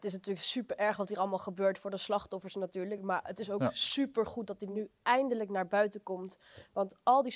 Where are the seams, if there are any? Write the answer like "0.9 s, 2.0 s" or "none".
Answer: none